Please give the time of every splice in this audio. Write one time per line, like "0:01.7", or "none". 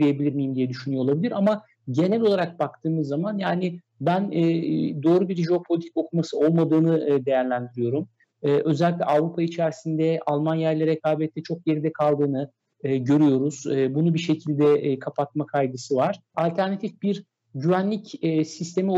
0:16.3